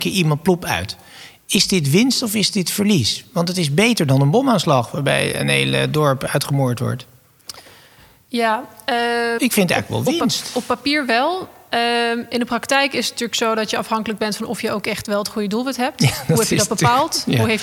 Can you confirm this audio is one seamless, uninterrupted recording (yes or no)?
no